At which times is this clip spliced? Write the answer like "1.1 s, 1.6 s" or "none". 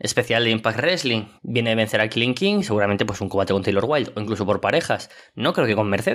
1.4 s